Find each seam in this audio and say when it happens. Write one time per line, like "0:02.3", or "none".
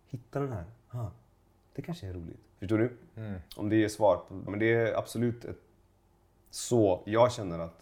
0:04.5